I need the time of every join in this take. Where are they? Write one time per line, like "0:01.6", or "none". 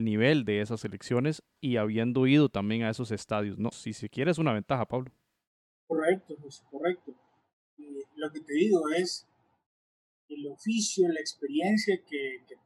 0:03.7